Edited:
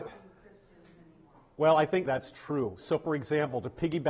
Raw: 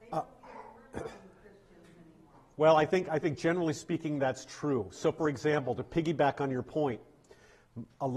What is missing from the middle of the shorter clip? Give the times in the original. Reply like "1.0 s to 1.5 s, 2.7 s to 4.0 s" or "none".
3.1 s to 4.2 s